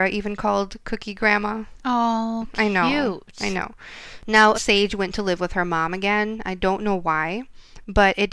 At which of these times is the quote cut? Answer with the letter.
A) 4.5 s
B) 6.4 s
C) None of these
A